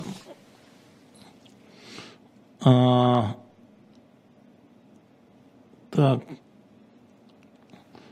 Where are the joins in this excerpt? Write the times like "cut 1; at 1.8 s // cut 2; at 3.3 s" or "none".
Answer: none